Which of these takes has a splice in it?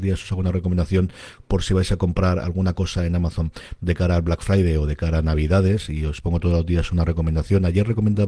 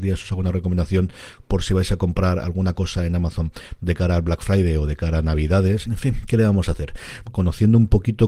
second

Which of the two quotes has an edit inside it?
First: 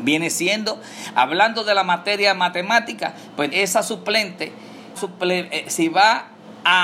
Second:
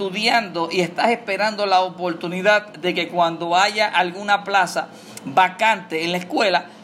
first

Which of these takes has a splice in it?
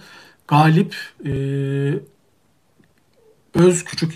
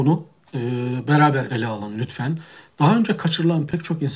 second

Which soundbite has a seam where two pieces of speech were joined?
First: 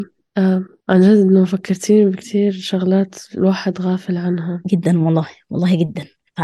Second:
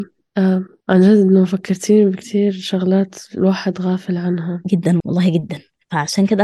second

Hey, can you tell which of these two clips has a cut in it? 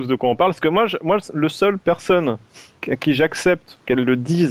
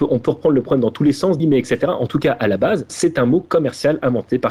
second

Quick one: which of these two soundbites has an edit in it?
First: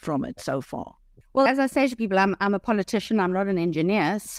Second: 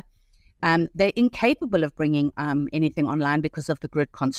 first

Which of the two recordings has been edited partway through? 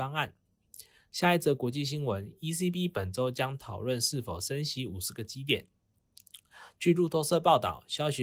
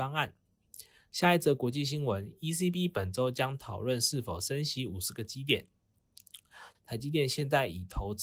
second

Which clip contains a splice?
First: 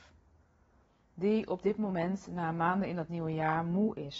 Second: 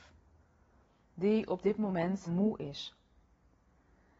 second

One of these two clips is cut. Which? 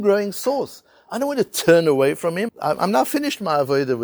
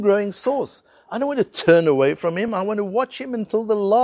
first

